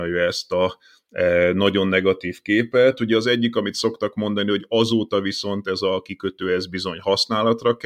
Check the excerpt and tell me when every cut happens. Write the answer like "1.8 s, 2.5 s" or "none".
none